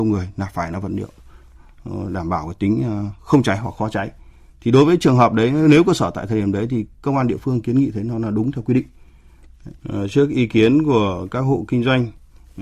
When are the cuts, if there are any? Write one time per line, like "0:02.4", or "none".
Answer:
0:09.8